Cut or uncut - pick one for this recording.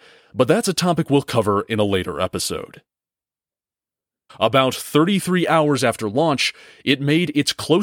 cut